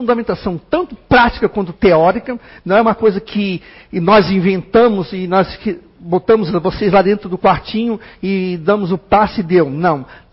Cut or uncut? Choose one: uncut